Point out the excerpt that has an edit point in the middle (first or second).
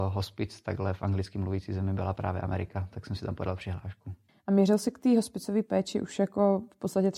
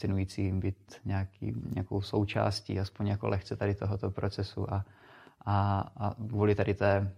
first